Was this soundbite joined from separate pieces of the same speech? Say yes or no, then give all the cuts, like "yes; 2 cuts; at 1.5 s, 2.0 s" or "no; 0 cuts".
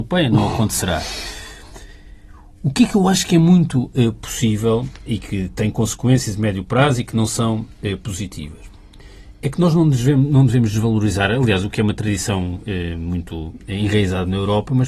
yes; 1 cut; at 5.1 s